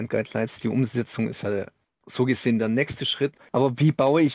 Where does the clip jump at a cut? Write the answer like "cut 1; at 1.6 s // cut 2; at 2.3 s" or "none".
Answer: none